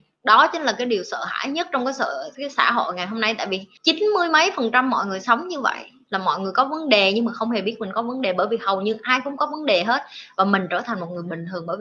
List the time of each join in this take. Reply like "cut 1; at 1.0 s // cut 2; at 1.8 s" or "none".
cut 1; at 2.3 s